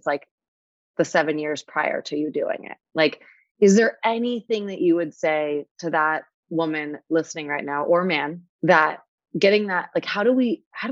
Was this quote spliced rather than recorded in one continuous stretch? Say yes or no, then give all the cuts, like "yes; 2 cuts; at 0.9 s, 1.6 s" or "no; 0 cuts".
yes; 1 cut; at 8.5 s